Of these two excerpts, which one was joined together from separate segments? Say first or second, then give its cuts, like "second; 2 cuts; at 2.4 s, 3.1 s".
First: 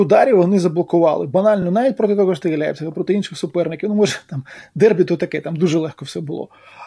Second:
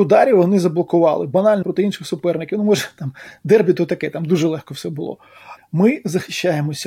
second; 2 cuts; at 1.6 s, 5.6 s